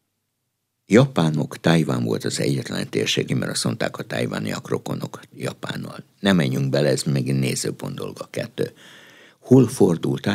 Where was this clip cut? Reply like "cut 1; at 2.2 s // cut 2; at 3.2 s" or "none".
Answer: cut 1; at 3.3 s